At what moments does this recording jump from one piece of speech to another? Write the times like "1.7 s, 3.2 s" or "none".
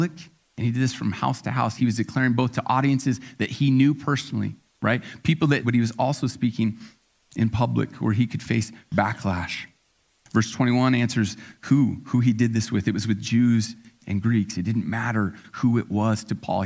1.8 s, 5.6 s